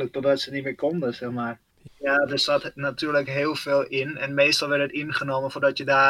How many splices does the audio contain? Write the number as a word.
one